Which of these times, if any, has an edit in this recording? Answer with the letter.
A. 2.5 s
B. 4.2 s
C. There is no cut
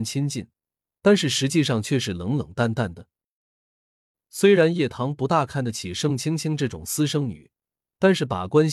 C